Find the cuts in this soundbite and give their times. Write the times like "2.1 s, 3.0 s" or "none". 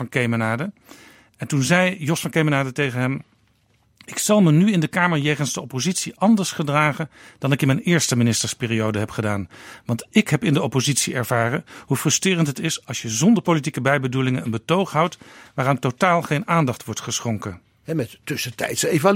17.8 s